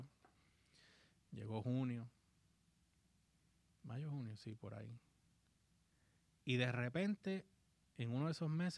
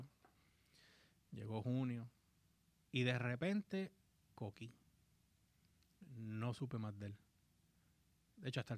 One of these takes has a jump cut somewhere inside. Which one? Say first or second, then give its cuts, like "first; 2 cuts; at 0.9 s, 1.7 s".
second; 2 cuts; at 2.8 s, 4.2 s